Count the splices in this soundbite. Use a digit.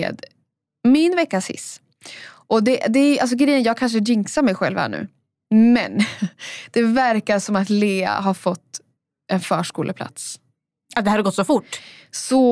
0